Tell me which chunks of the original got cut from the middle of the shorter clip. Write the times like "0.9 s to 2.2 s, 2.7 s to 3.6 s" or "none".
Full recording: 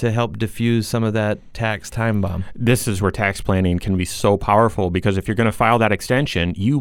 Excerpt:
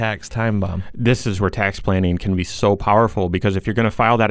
none